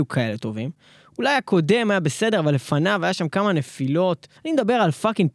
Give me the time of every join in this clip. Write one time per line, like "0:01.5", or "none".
0:04.4